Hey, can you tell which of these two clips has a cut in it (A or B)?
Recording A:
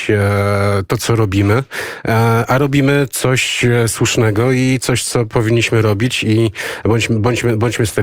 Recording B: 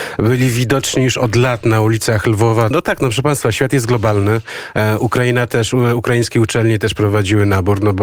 B